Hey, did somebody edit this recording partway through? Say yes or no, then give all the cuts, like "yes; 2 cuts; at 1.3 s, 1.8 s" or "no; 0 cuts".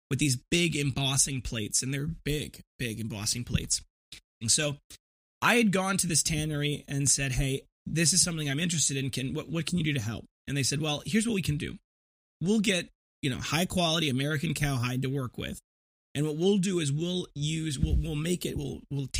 yes; 1 cut; at 4.4 s